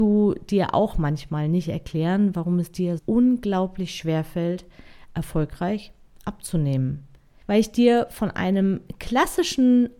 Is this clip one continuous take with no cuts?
no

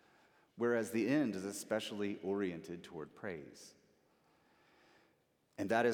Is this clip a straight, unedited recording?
yes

